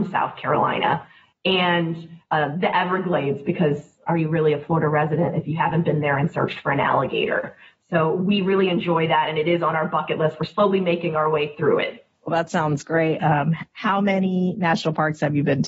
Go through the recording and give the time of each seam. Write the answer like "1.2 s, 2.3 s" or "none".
12.2 s, 13.2 s